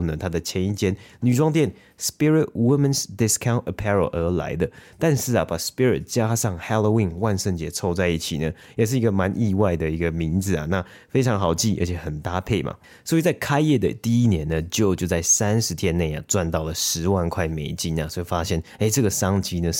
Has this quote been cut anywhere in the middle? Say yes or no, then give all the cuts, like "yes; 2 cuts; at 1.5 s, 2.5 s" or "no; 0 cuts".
no; 0 cuts